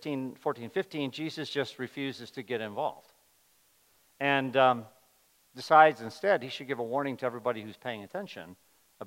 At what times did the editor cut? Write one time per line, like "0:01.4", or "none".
none

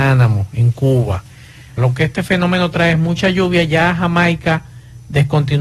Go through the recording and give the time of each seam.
0:01.8

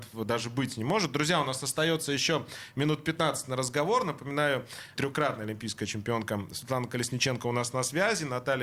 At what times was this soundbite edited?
0:05.0

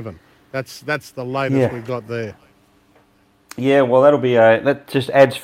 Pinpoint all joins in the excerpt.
none

